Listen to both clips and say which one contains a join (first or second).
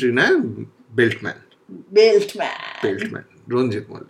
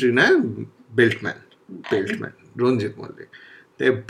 second